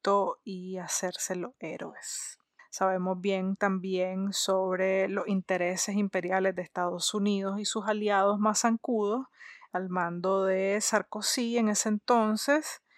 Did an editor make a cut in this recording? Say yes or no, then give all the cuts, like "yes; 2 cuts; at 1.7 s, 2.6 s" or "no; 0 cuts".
yes; 2 cuts; at 2.6 s, 9.7 s